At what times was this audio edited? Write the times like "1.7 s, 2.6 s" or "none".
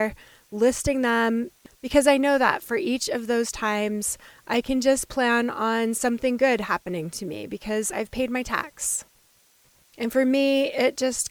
none